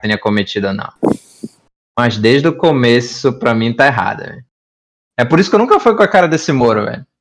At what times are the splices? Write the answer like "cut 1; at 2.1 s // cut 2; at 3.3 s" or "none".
none